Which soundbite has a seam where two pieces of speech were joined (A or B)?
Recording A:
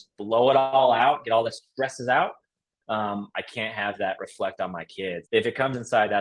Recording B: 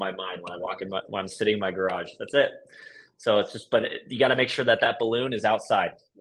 A